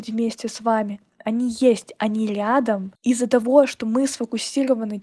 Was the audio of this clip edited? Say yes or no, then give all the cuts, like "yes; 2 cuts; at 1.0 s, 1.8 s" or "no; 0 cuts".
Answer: no; 0 cuts